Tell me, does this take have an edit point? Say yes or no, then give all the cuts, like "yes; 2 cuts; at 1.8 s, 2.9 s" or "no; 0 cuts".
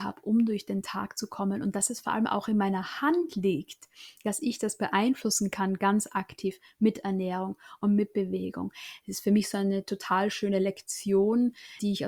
no; 0 cuts